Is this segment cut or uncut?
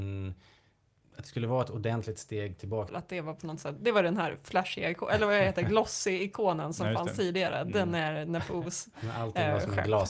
cut